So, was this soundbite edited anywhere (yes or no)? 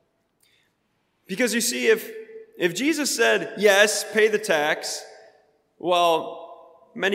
no